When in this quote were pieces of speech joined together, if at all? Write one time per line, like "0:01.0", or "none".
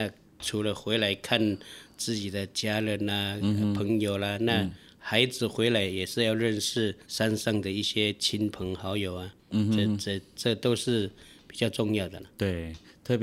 0:07.0